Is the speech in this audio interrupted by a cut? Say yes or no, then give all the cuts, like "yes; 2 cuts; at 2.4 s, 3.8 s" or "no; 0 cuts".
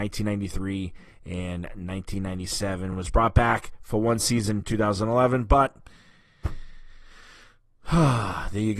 no; 0 cuts